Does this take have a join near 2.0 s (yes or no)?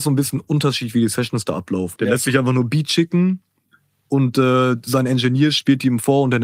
yes